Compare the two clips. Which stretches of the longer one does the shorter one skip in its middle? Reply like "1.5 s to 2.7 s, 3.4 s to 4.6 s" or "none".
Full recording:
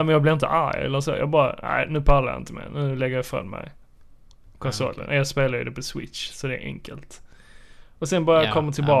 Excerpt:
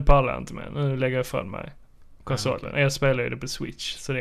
4.2 s to 4.5 s